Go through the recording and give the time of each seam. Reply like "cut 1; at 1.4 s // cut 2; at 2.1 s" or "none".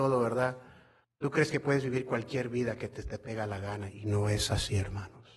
cut 1; at 1.0 s